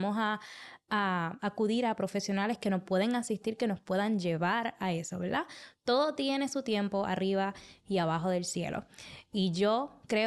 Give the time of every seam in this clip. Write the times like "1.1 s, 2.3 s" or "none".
none